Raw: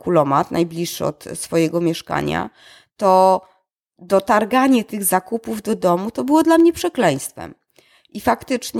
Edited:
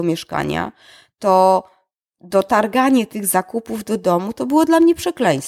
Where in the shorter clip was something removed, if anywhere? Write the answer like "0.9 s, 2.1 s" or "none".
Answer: none